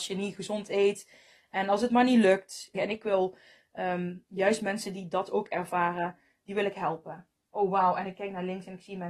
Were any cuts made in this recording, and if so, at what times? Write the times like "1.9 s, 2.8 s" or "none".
2.7 s